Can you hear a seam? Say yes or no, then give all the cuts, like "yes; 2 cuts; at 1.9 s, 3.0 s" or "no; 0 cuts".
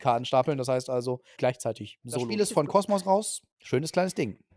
yes; 2 cuts; at 1.4 s, 3.5 s